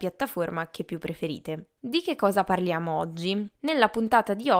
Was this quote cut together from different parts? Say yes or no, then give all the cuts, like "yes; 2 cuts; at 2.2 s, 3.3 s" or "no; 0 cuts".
yes; 1 cut; at 1.8 s